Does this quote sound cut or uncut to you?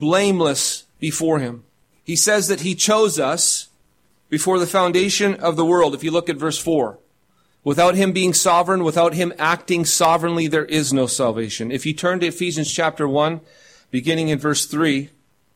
cut